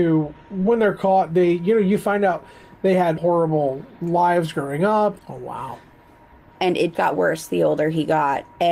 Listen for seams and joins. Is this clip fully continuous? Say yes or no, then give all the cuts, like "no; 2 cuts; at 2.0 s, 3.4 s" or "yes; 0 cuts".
no; 3 cuts; at 3.2 s, 5.2 s, 6.9 s